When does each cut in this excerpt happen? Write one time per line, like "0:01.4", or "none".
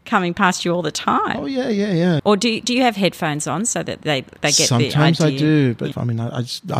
0:02.2
0:05.9